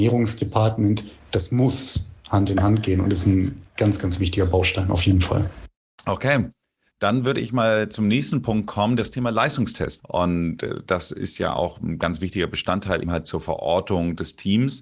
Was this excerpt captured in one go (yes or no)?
no